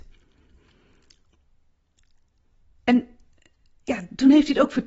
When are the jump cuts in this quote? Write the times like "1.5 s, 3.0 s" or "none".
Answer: none